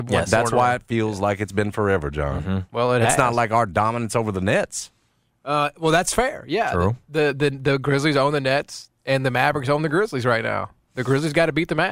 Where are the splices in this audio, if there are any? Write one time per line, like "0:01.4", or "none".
none